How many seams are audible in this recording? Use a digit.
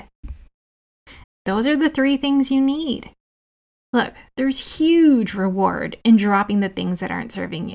1